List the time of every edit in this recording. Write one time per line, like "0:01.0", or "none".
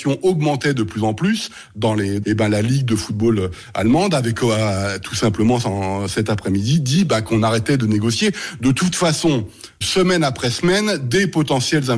0:02.2
0:09.8